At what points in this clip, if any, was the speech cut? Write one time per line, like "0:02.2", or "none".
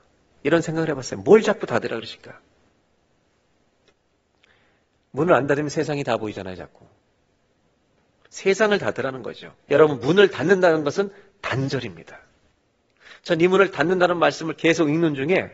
0:09.7